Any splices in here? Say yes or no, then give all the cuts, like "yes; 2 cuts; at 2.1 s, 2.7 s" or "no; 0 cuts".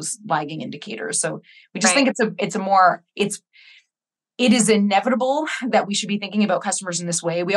no; 0 cuts